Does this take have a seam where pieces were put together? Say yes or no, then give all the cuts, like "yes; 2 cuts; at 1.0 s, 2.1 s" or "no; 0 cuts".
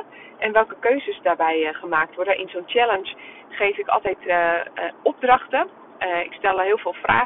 no; 0 cuts